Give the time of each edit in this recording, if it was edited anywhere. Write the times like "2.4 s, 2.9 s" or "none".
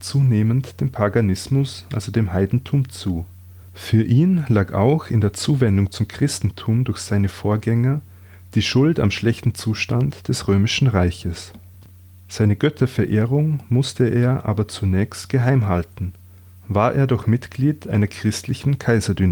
none